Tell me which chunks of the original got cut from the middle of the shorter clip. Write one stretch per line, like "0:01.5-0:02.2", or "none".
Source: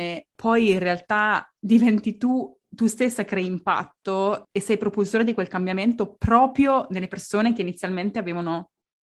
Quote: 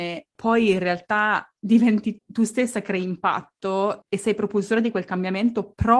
0:02.2-0:02.6